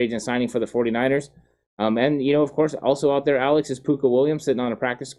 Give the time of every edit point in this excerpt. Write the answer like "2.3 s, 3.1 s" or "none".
none